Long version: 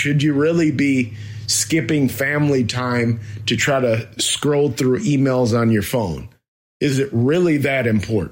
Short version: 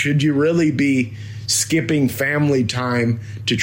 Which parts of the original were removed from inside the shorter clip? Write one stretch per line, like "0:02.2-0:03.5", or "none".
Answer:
none